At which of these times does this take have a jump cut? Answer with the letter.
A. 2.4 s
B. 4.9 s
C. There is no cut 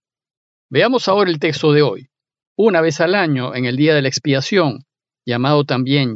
A